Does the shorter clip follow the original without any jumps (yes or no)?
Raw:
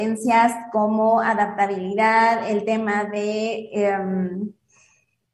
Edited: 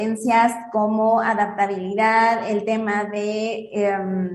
yes